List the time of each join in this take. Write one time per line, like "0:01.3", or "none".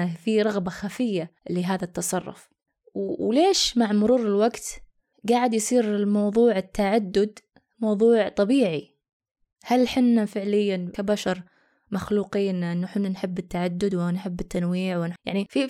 0:01.4

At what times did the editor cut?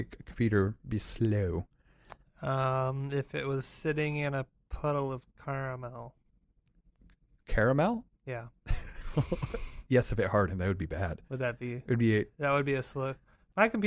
none

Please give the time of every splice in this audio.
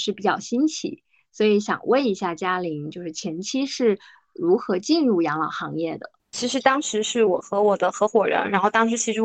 0:06.2

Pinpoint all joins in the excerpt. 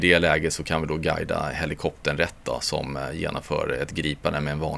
none

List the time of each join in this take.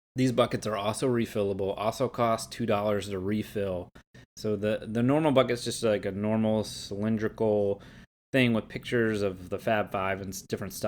none

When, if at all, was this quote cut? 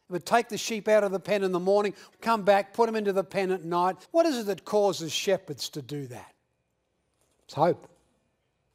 0:02.1
0:04.0

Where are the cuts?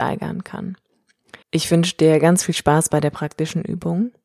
0:01.4

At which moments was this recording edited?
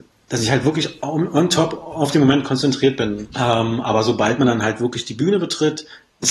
0:03.3

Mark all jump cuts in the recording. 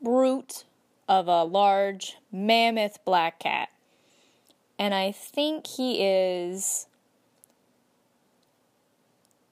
none

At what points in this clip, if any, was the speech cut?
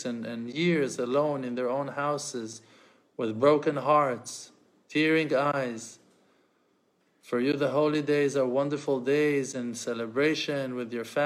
none

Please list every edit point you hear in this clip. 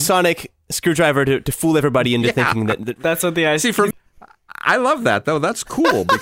0:03.9

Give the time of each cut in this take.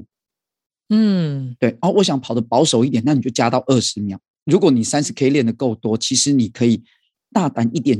0:01.8

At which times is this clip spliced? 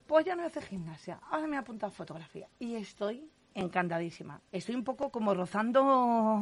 0:04.5

